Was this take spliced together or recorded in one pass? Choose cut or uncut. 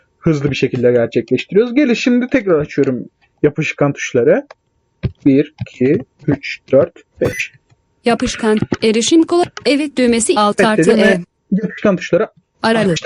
cut